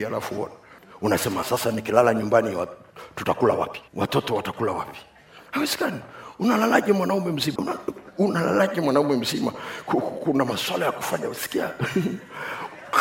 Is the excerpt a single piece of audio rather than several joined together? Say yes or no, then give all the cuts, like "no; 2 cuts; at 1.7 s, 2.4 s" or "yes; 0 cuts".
no; 2 cuts; at 1.4 s, 7.6 s